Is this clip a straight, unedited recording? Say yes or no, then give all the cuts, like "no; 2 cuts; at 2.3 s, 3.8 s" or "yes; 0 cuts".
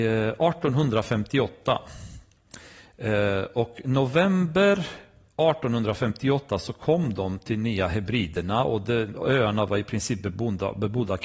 yes; 0 cuts